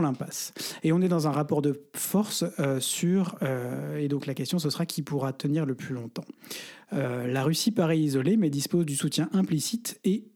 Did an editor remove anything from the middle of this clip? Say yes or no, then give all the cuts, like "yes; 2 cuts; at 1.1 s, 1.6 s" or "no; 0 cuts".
no; 0 cuts